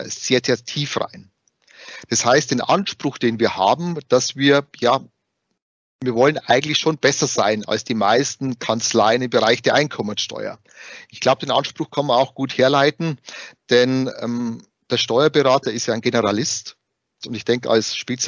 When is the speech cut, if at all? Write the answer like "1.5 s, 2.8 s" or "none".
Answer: 17.2 s